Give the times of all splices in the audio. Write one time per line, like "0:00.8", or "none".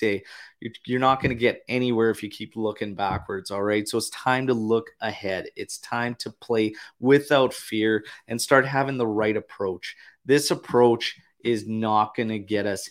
none